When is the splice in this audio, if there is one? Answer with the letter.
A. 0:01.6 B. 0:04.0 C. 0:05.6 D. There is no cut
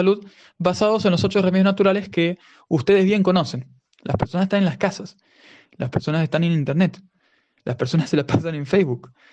B